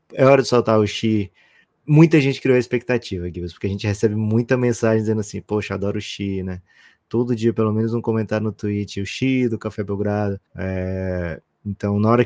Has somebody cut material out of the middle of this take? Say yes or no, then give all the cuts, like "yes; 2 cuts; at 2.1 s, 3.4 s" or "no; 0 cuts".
yes; 1 cut; at 10.5 s